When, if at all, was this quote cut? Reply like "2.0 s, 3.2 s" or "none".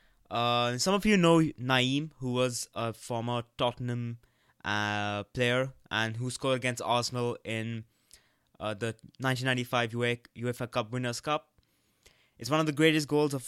none

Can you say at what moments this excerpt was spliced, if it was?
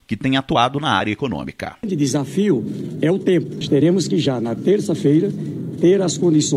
none

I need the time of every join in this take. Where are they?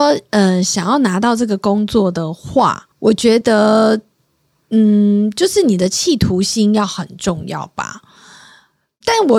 2.9 s

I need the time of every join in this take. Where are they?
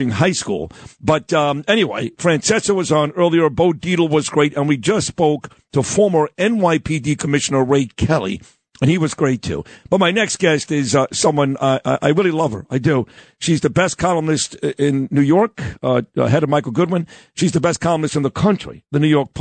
none

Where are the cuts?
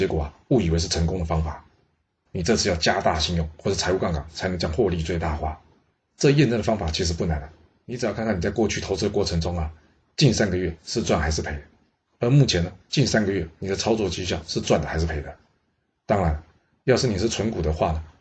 2.3 s, 6.0 s

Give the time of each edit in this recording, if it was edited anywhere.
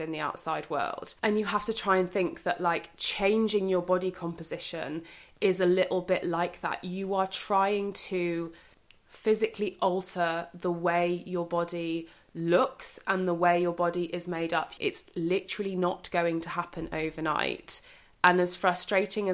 1.2 s, 14.8 s

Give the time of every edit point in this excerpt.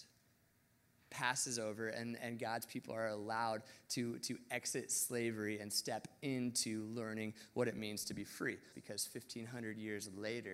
8.7 s

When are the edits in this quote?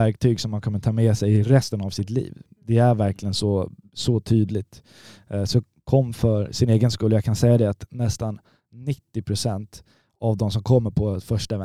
none

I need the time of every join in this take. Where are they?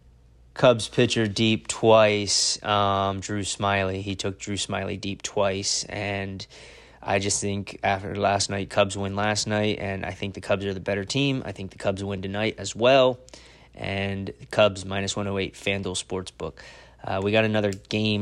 none

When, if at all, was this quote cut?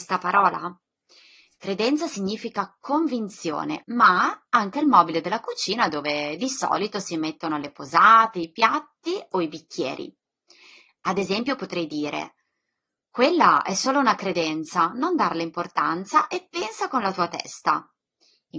3.8 s

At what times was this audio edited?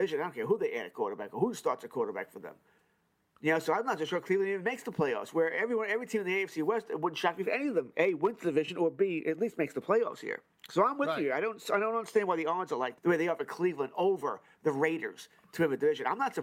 13.0 s

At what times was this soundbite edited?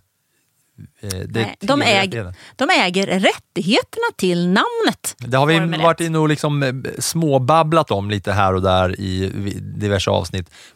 5.2 s

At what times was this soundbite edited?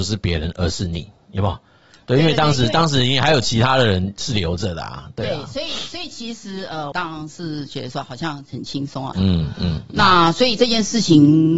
6.9 s, 9.1 s

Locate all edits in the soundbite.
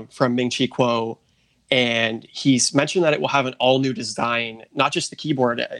none

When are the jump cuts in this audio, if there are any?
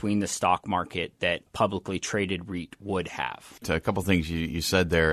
3.6 s

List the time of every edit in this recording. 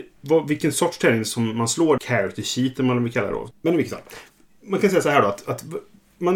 2.0 s, 3.5 s

